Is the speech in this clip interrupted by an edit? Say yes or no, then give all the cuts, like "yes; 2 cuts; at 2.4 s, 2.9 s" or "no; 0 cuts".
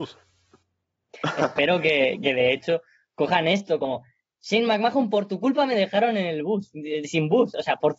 no; 0 cuts